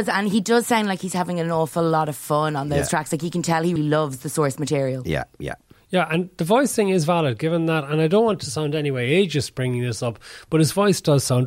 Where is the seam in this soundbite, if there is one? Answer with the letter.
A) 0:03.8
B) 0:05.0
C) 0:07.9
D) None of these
A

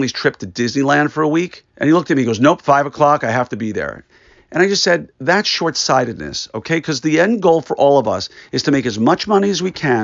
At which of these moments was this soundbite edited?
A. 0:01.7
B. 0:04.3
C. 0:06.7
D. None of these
A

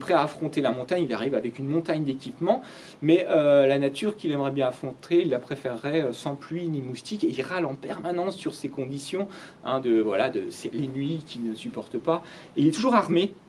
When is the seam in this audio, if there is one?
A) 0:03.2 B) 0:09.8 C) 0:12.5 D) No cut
B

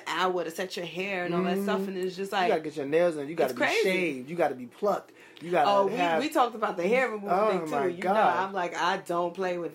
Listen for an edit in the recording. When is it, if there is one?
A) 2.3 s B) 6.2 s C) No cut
C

